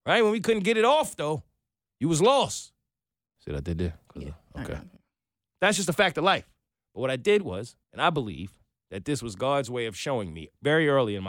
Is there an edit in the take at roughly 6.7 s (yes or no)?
yes